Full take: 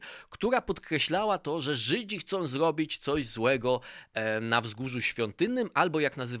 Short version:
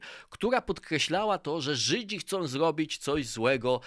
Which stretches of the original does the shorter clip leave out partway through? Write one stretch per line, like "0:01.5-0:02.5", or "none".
none